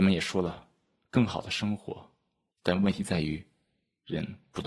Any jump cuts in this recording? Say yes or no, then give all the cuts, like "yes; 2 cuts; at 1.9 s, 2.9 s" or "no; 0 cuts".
yes; 1 cut; at 2.5 s